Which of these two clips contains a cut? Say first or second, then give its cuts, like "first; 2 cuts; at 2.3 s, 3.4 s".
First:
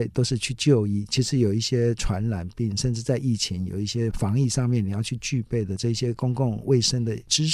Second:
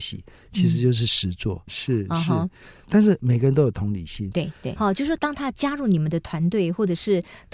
second; 2 cuts; at 1.7 s, 4.8 s